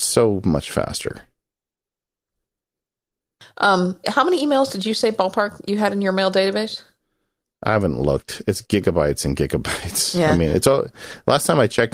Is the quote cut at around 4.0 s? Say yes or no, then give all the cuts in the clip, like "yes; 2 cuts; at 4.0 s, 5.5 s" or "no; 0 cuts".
yes; 1 cut; at 4.0 s